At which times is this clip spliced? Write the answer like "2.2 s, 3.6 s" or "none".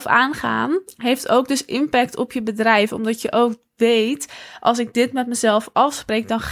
none